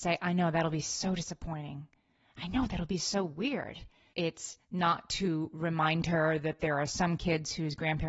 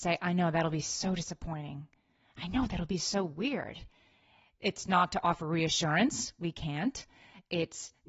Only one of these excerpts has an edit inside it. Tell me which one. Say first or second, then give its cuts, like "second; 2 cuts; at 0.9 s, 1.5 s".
first; 1 cut; at 4.1 s